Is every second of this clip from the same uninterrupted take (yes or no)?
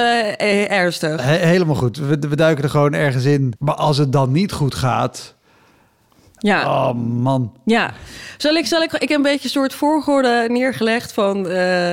no